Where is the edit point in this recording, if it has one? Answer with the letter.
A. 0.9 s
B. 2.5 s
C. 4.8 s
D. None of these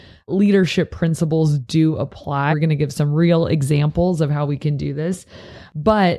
B